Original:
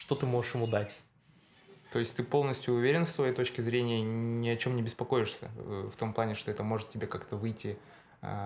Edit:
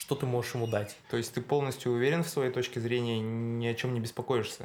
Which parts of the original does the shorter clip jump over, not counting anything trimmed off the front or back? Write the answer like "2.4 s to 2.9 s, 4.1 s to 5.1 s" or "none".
1.0 s to 1.9 s